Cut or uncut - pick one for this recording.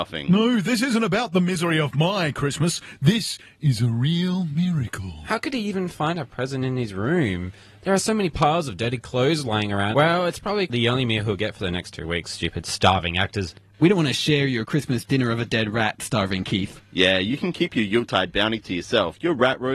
cut